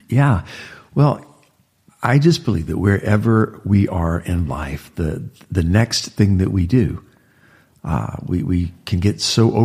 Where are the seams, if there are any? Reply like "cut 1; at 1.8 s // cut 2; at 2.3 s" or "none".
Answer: none